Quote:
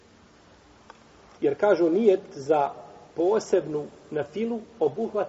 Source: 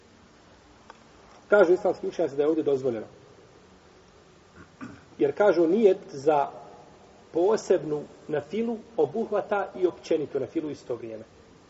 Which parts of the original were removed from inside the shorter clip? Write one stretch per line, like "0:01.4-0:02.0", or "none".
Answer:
0:01.4-0:05.1
0:06.9-0:07.3